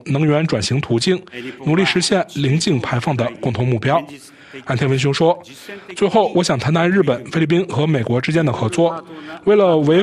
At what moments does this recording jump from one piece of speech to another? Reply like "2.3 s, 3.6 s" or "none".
none